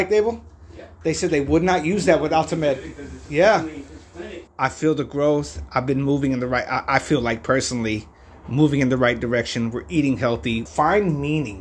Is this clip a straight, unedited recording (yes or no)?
no